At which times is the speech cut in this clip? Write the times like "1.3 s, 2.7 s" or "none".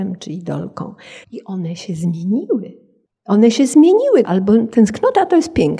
1.2 s, 4.2 s